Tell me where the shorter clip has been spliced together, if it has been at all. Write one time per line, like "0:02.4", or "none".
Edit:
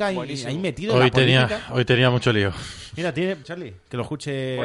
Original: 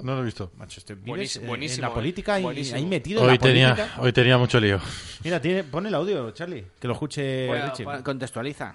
0:03.4